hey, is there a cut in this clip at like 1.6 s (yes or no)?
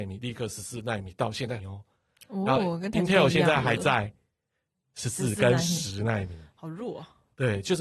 yes